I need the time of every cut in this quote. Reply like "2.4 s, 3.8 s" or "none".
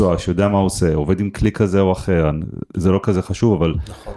2.7 s